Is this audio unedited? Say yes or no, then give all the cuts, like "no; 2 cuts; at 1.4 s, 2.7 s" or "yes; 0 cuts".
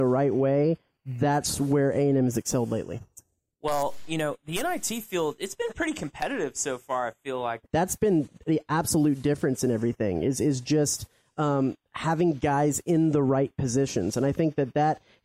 no; 1 cut; at 7.6 s